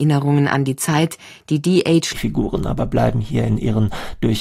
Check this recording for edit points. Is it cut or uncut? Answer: cut